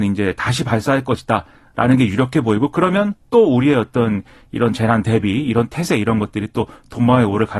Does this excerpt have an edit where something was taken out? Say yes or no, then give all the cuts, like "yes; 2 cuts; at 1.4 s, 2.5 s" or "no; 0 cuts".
no; 0 cuts